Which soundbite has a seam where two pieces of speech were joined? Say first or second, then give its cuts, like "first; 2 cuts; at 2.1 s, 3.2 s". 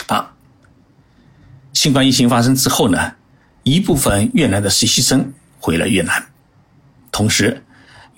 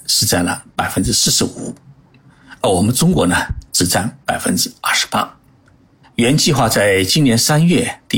second; 1 cut; at 6.0 s